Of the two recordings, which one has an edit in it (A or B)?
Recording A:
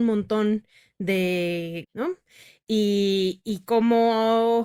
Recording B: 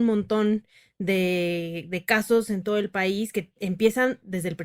A